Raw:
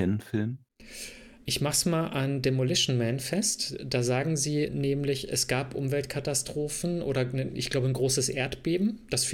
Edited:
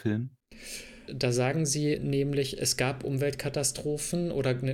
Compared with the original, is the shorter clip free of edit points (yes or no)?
no